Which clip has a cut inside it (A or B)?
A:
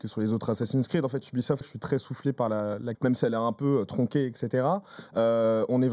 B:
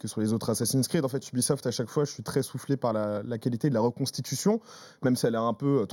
A